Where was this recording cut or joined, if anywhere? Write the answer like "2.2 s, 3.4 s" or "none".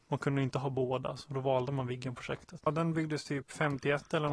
2.7 s